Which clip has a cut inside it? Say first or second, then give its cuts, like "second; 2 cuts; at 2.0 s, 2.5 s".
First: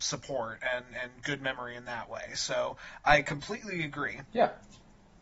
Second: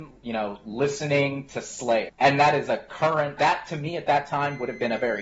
second; 2 cuts; at 2.1 s, 3.4 s